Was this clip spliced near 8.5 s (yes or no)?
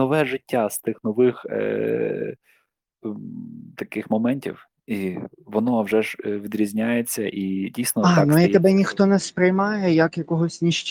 no